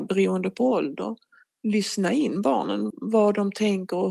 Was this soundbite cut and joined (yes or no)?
yes